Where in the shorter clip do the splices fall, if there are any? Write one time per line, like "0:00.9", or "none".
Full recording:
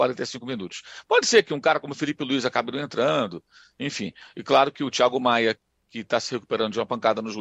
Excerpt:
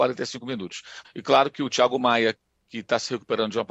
0:01.0